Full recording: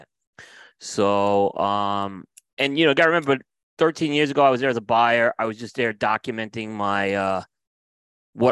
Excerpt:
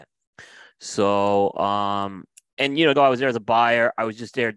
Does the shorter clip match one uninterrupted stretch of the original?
no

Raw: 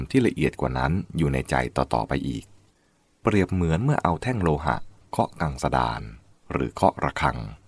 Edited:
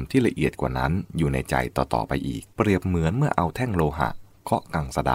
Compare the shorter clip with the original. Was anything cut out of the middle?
yes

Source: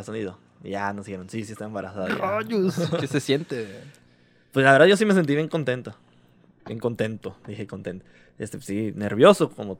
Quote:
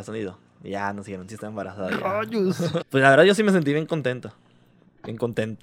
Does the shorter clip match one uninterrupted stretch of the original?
no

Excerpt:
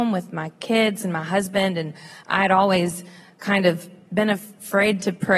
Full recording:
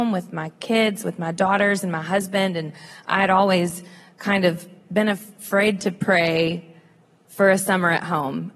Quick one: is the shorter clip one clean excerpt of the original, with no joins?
no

